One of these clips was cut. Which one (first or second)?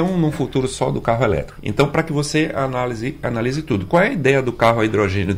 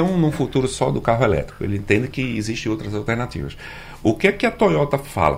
first